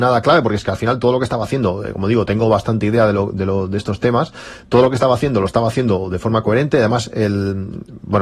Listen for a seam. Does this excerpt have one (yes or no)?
no